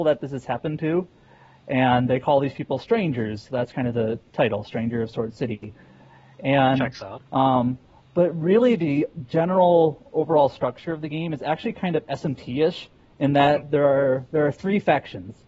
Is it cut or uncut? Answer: cut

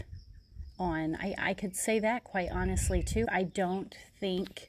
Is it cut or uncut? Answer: cut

